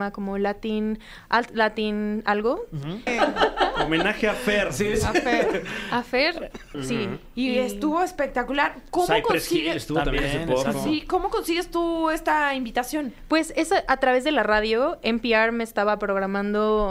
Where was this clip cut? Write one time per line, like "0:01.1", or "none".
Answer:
0:03.1
0:06.7